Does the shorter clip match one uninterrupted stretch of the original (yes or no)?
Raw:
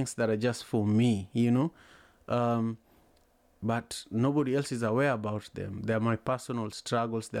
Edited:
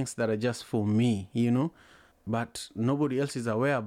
no